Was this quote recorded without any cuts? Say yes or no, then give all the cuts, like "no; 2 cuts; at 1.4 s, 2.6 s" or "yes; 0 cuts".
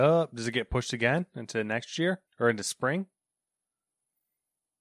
no; 1 cut; at 2.3 s